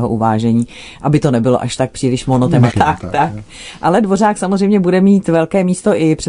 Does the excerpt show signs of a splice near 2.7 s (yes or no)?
yes